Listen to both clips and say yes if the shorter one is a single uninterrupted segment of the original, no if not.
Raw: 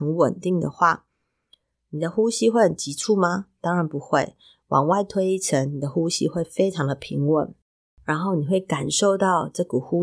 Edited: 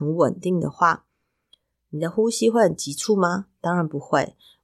yes